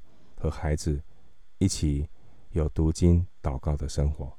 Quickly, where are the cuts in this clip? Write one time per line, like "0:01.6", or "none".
none